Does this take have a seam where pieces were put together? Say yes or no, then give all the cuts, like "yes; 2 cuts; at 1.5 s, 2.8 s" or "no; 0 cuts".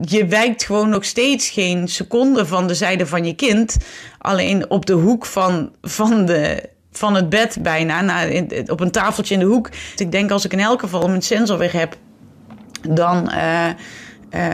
yes; 1 cut; at 10.0 s